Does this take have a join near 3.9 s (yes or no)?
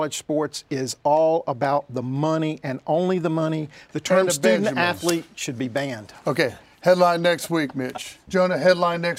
no